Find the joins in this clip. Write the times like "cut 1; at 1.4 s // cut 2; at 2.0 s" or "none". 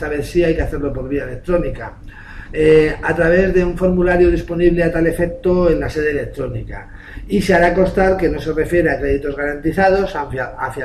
none